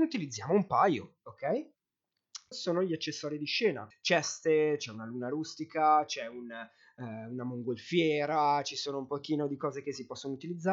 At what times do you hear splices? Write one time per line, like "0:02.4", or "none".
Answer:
0:02.5
0:03.9